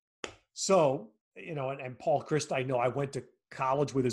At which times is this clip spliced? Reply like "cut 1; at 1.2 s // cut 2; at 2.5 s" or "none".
cut 1; at 1.2 s